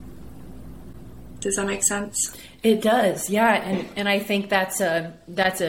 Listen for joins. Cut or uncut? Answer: uncut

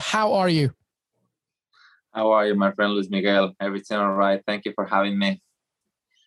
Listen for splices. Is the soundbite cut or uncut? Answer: uncut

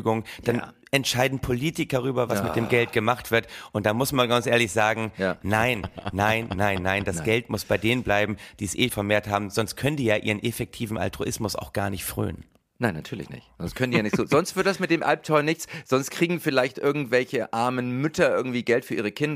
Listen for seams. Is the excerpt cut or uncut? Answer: cut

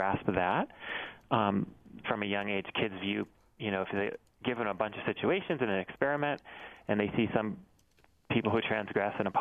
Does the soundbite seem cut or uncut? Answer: cut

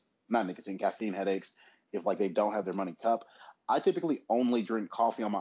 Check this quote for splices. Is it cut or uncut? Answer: uncut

